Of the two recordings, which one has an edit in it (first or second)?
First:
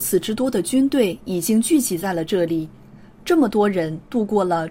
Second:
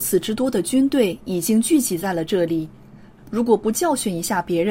second